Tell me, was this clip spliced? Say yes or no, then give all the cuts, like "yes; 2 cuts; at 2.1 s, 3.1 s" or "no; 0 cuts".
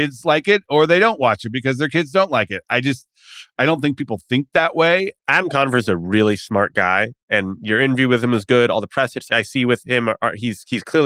yes; 1 cut; at 5.2 s